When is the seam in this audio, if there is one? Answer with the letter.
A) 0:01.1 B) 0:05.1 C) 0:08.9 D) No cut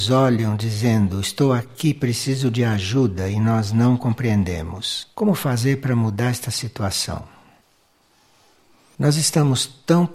B